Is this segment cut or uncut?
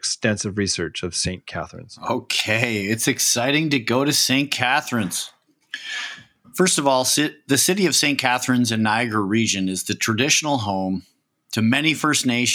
uncut